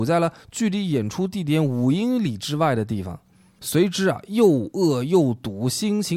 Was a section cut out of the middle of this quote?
no; 0 cuts

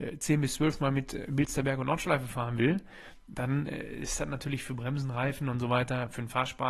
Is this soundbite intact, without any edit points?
yes; 0 cuts

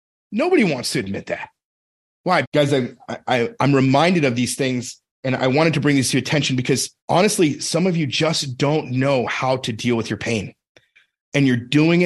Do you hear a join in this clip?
yes; 2 cuts; at 2.4 s, 7.0 s

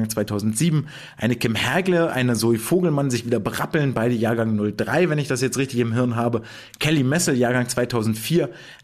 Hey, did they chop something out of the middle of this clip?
no; 0 cuts

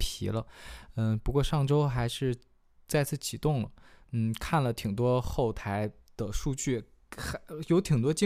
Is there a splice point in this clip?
no; 0 cuts

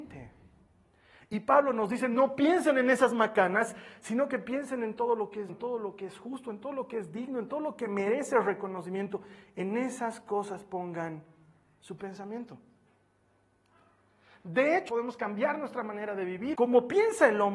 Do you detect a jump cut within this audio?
yes; 3 cuts; at 5.5 s, 14.9 s, 16.5 s

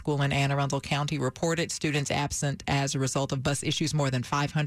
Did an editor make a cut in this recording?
no; 0 cuts

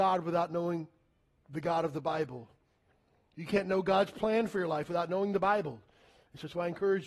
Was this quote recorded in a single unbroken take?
yes; 0 cuts

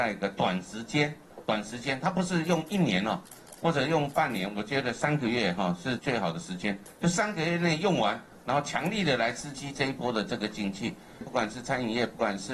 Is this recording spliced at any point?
yes; 2 cuts; at 6.0 s, 11.2 s

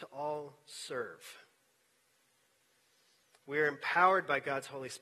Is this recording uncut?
yes; 0 cuts

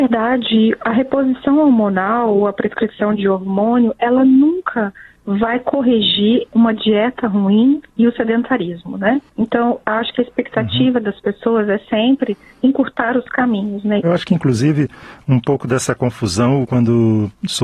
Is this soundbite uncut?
no; 2 cuts; at 14.0 s, 16.6 s

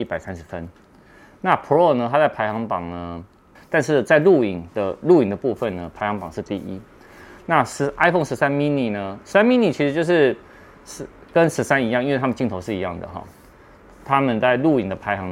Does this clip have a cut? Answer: yes; 1 cut; at 3.5 s

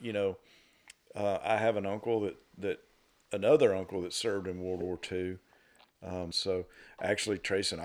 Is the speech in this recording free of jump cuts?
no; 1 cut; at 6.3 s

